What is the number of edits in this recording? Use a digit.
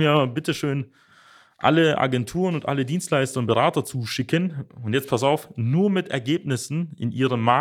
0